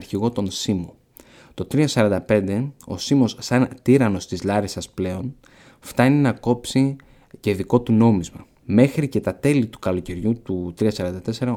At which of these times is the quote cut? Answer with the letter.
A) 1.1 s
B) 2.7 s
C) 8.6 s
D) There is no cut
C